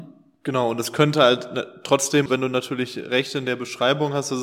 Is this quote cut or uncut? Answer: cut